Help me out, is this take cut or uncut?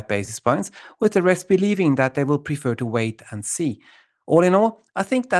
uncut